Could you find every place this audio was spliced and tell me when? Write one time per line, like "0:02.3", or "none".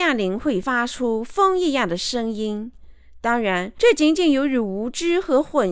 none